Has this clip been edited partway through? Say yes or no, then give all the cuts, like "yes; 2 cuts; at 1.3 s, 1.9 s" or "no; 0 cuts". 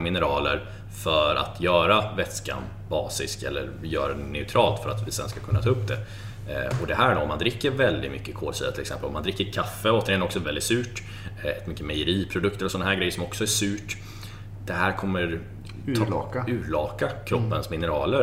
yes; 1 cut; at 10.4 s